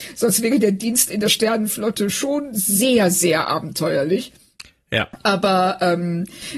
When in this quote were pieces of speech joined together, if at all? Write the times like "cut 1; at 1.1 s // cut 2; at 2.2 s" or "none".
none